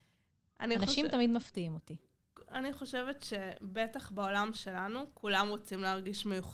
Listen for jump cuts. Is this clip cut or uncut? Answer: uncut